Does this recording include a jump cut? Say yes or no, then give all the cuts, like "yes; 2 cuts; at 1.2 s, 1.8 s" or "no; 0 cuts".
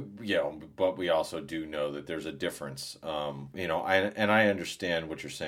yes; 1 cut; at 3.5 s